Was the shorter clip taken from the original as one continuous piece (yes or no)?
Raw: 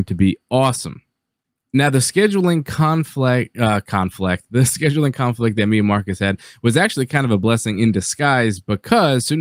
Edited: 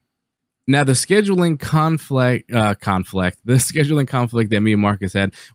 yes